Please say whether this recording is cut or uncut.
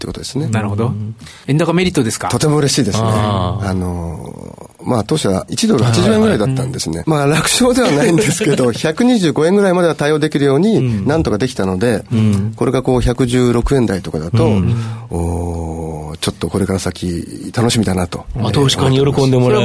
cut